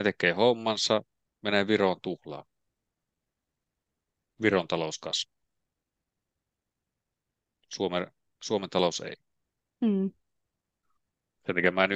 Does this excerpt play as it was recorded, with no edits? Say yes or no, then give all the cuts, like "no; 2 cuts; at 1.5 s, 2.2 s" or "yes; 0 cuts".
yes; 0 cuts